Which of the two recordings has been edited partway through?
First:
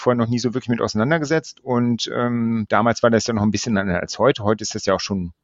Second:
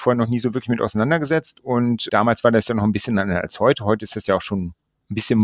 second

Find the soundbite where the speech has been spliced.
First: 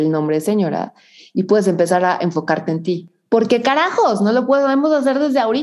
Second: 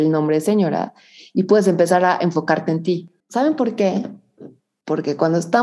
second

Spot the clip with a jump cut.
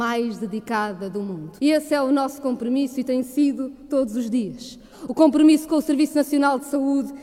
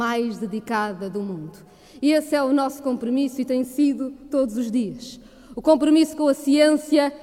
first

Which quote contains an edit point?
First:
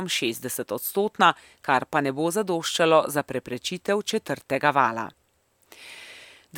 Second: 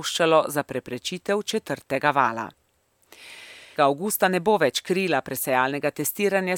second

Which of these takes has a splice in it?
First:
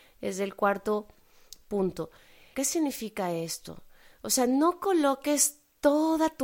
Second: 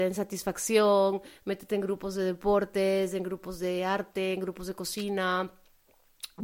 first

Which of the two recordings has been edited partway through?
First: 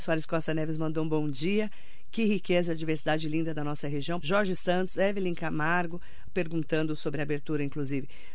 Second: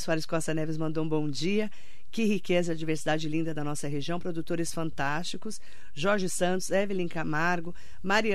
first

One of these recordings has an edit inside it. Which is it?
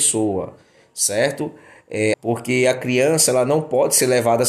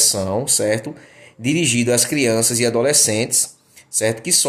first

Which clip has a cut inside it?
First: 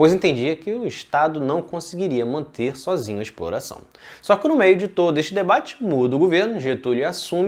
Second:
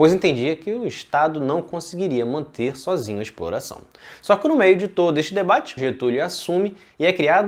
second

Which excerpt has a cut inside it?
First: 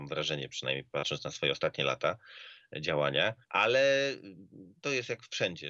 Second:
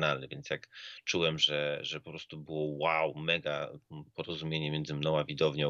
first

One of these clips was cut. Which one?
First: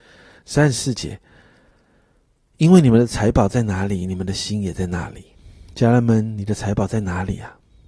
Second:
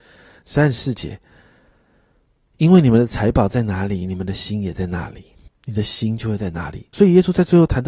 second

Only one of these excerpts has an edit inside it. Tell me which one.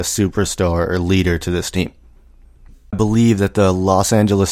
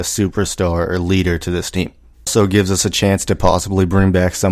second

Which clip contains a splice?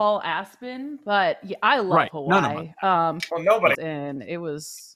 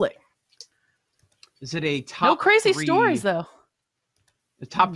first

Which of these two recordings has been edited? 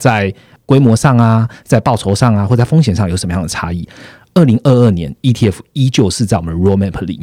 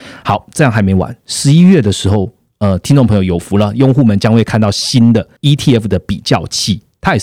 second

